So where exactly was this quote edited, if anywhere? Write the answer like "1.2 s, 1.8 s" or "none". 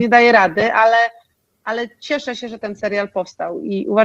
none